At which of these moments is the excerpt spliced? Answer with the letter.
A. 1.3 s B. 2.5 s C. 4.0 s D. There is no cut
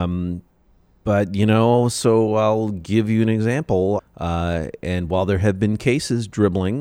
C